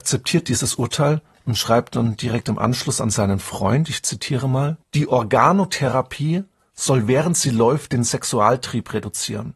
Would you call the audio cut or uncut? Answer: cut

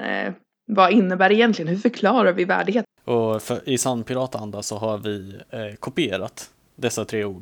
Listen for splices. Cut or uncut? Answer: cut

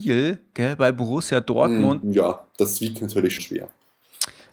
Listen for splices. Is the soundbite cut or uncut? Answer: cut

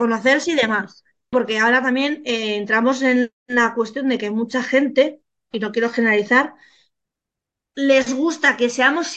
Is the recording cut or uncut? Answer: cut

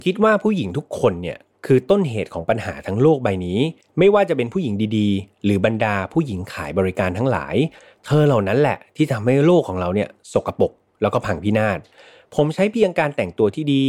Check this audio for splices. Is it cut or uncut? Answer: uncut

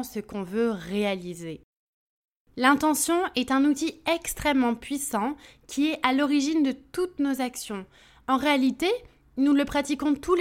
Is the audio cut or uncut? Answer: uncut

